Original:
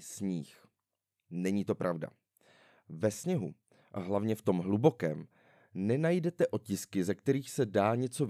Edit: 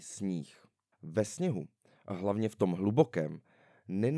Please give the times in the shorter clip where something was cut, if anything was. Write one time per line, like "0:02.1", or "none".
0:00.9